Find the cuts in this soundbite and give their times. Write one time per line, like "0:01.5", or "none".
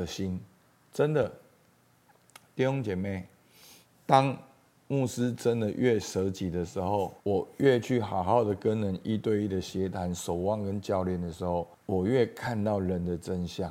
0:07.2
0:11.7